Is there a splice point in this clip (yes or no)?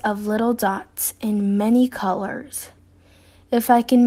no